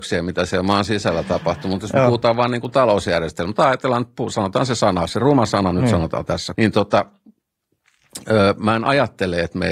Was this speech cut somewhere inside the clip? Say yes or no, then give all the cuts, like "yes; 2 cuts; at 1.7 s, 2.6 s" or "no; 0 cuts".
yes; 1 cut; at 6.5 s